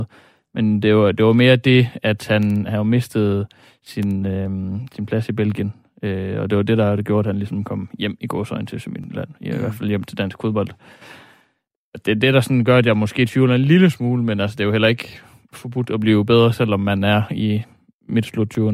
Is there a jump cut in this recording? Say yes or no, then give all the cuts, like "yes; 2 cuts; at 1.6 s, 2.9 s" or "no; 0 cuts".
no; 0 cuts